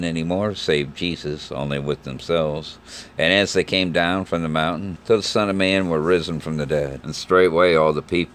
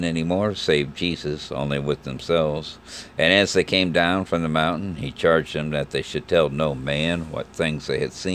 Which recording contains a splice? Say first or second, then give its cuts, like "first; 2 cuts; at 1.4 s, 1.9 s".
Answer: first; 2 cuts; at 5.0 s, 7.0 s